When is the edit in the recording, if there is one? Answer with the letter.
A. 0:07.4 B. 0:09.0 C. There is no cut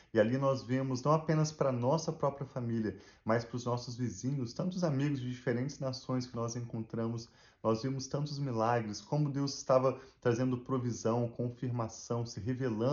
C